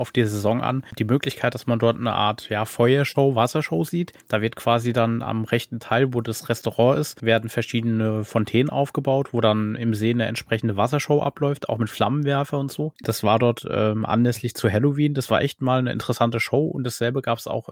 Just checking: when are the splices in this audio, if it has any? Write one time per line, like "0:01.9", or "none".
0:04.2
0:12.9